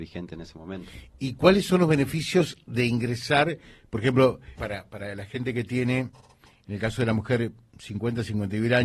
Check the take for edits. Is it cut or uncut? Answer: cut